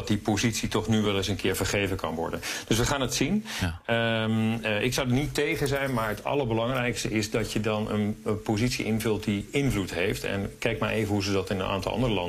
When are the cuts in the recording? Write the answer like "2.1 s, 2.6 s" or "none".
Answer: none